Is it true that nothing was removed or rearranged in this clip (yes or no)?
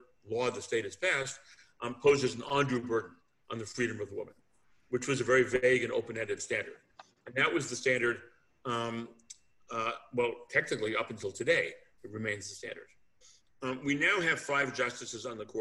yes